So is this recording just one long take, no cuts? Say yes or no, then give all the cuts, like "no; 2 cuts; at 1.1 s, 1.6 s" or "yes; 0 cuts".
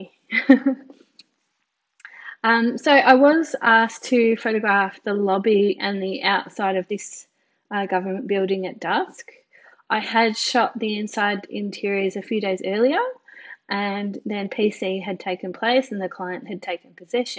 yes; 0 cuts